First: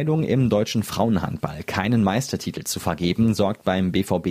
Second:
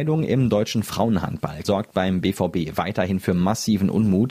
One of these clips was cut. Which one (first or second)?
second